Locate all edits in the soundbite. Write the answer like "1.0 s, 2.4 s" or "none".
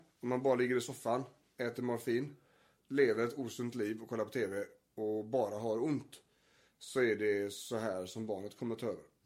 none